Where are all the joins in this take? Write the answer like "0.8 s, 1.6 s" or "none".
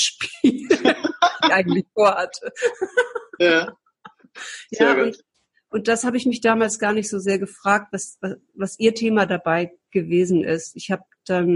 none